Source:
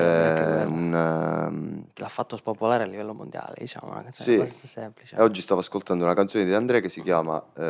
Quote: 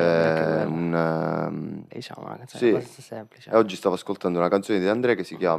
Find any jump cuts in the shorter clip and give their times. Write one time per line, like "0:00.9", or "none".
0:01.9